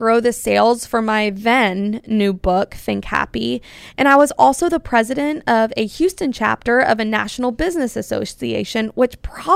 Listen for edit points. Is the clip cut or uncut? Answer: uncut